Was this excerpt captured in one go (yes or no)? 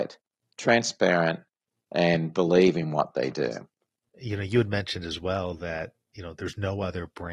yes